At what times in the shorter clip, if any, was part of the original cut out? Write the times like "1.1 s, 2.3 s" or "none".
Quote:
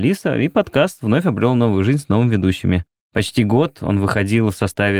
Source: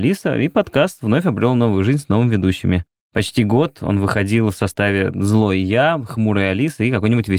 none